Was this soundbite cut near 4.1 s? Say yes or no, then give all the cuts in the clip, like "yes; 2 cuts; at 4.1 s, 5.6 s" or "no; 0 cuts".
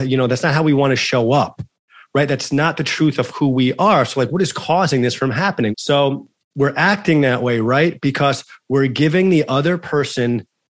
no; 1 cut; at 5.7 s